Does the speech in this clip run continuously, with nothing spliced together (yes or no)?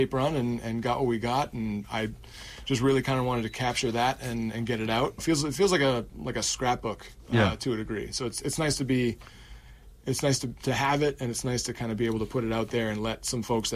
no